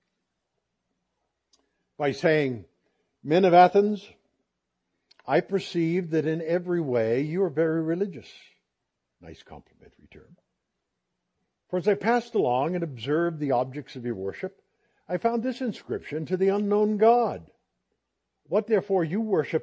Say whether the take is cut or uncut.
uncut